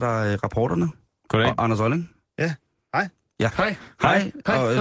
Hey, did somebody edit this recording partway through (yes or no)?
yes